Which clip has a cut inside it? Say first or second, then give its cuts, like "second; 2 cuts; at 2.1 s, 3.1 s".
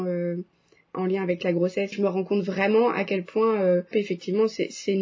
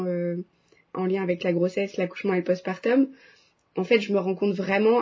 first; 2 cuts; at 1.9 s, 3.9 s